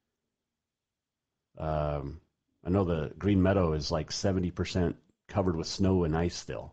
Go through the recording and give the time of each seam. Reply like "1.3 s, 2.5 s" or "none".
none